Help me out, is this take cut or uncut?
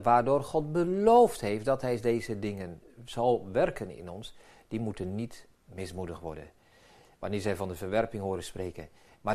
cut